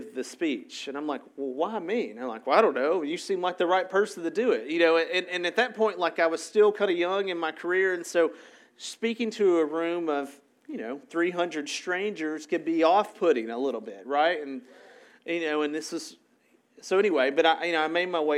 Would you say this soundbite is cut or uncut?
uncut